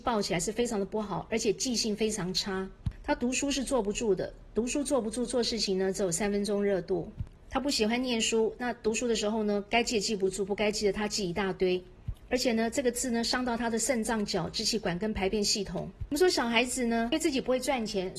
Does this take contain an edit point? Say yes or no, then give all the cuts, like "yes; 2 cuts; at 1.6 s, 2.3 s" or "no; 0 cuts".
no; 0 cuts